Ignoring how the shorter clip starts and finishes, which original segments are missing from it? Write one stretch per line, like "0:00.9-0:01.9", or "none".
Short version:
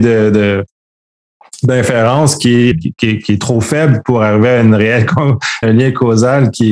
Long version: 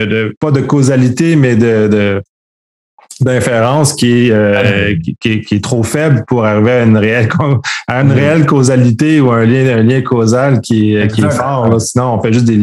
0:04.3-0:04.9
0:07.9-0:09.7